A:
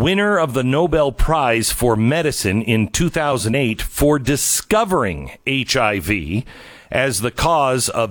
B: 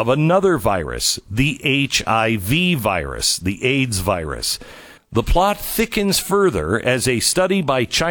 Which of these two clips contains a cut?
B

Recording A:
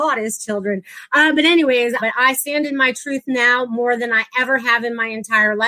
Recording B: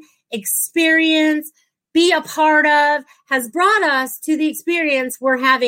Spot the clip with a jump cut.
A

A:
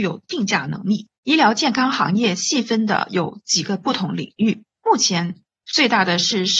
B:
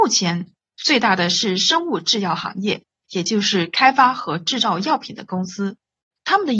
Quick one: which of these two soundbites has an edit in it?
A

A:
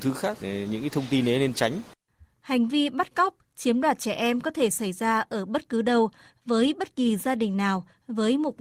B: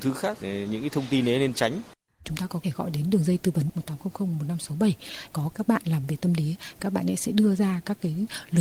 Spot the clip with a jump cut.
B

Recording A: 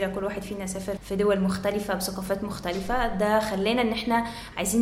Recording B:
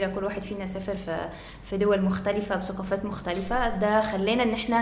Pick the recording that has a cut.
A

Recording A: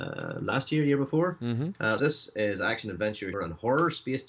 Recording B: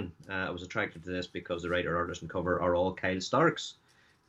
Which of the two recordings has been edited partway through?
A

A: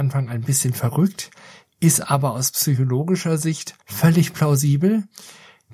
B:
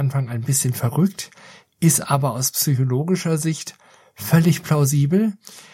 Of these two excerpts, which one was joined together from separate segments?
A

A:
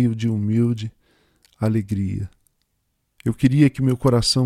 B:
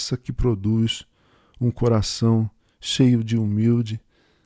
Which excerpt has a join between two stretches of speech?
A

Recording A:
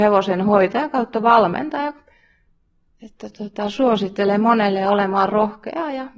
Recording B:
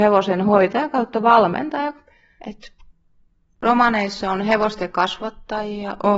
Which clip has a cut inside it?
B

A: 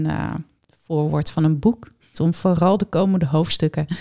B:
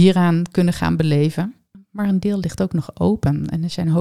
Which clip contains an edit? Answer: A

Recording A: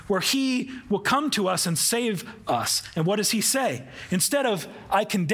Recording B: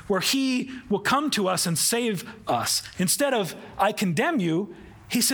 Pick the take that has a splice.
B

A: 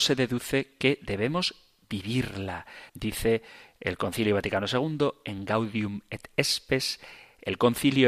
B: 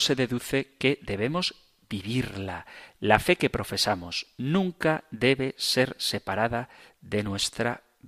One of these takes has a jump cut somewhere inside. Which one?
A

